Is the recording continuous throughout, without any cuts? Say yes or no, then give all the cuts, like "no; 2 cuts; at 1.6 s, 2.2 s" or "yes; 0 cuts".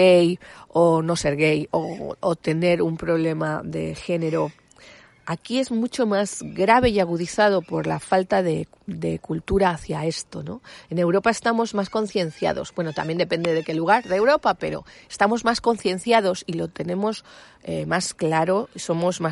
yes; 0 cuts